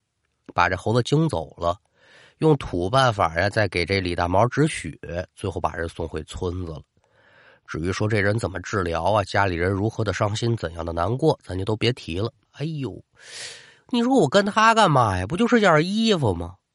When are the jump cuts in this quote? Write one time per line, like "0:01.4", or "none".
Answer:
0:12.5